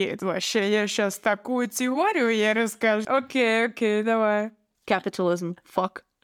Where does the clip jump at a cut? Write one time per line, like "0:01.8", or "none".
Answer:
0:03.0
0:04.7